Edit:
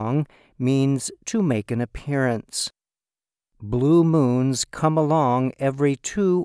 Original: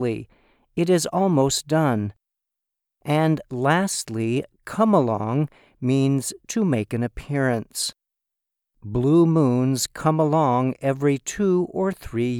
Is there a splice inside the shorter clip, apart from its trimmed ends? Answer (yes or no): no